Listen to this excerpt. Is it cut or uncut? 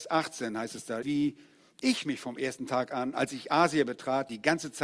cut